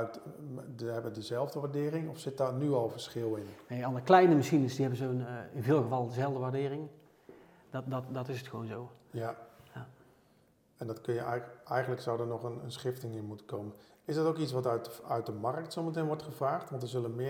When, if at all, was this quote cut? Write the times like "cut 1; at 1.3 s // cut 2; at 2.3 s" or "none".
cut 1; at 7.6 s